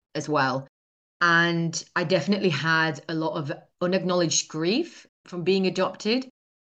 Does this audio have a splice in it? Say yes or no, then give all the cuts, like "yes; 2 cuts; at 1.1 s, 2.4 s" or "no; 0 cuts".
yes; 2 cuts; at 1.1 s, 5.1 s